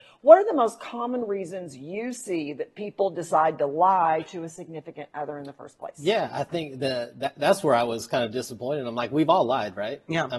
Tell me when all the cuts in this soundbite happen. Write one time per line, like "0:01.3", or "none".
none